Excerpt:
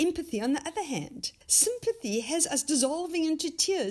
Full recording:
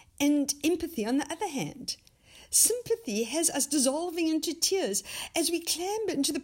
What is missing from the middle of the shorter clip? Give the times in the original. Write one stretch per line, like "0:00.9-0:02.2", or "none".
0:02.1-0:02.4